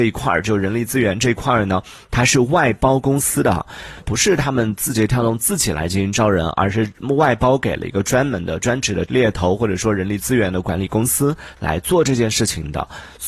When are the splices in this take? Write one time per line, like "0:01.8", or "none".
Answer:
0:04.0